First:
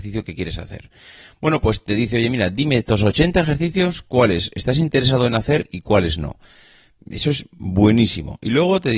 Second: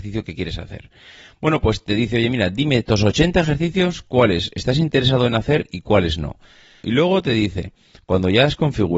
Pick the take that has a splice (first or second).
second